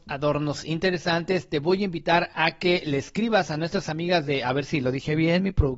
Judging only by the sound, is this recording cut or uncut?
uncut